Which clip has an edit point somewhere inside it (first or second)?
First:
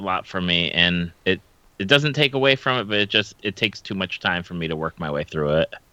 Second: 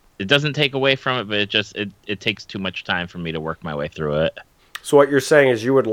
first